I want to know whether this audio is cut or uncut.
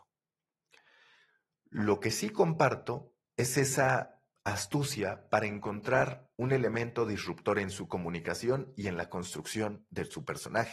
cut